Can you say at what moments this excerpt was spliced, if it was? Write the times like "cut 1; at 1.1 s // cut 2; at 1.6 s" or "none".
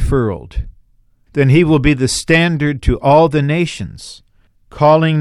none